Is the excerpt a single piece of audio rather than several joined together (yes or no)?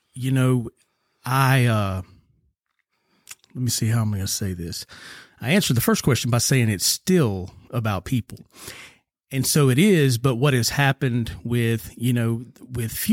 yes